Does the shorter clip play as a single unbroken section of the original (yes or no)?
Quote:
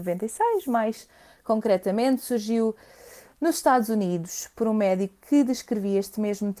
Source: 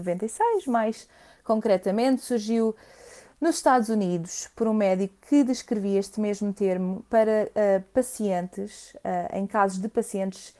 yes